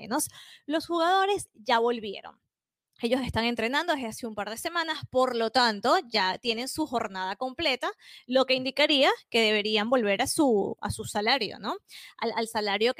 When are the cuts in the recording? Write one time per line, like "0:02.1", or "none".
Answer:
none